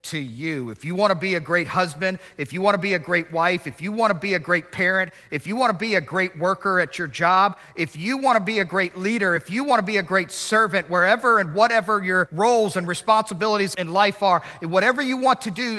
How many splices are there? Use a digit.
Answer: 0